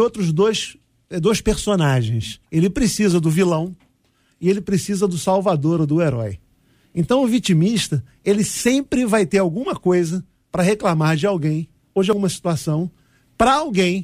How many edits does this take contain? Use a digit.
1